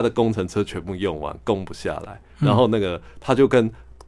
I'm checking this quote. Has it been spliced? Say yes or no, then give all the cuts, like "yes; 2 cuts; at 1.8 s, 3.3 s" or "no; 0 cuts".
yes; 1 cut; at 2.3 s